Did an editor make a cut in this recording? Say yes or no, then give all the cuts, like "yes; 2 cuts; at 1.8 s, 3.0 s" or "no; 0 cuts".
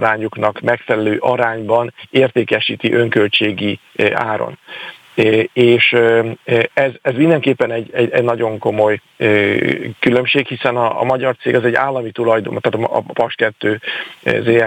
no; 0 cuts